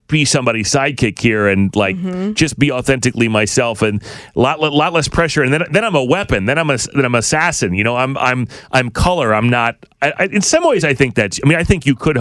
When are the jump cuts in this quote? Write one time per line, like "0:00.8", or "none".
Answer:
0:10.1